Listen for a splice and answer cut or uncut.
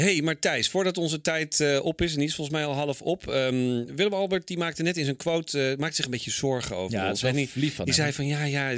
uncut